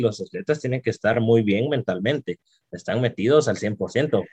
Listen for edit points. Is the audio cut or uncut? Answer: uncut